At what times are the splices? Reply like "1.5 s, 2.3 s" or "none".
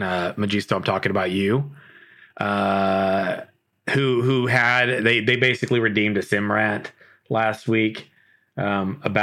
none